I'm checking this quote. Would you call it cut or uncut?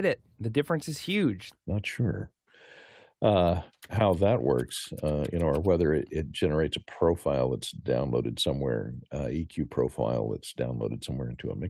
cut